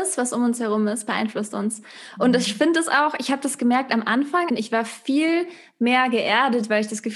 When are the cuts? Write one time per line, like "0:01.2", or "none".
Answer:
0:04.5